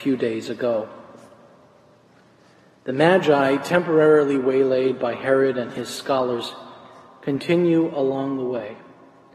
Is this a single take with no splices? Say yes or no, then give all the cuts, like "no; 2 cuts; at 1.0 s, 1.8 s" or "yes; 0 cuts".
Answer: yes; 0 cuts